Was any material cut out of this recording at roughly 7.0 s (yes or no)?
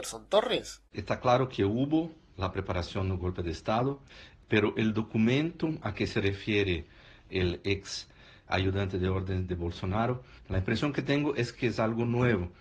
no